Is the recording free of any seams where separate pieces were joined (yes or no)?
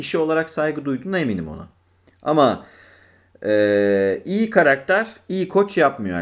yes